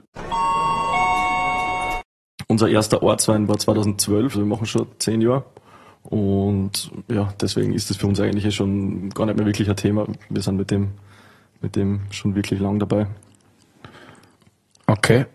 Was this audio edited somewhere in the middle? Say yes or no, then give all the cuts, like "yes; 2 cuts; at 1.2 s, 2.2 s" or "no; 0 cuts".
yes; 1 cut; at 4.3 s